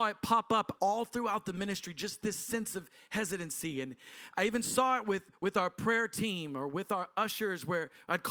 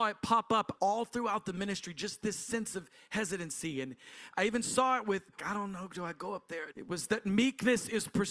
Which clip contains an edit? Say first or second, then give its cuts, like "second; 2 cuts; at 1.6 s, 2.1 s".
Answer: second; 2 cuts; at 5.4 s, 6.7 s